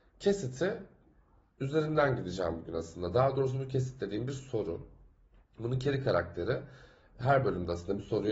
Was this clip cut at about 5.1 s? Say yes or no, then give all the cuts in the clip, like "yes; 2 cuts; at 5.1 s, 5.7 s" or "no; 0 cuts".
no; 0 cuts